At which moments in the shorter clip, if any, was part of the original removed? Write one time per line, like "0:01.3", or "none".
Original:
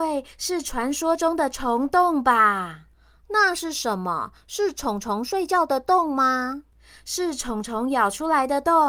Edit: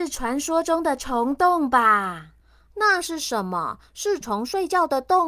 0:04.2